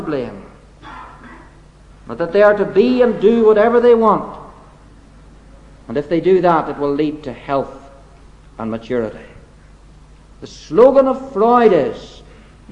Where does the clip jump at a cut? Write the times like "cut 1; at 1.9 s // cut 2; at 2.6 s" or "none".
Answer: none